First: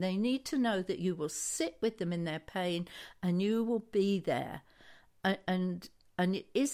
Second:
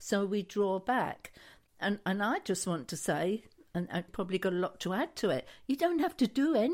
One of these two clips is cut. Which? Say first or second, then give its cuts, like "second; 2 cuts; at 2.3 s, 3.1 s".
second; 1 cut; at 4.1 s